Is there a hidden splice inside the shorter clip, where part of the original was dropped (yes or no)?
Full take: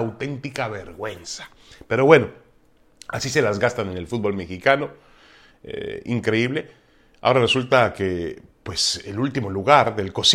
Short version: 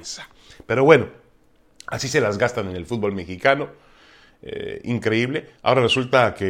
yes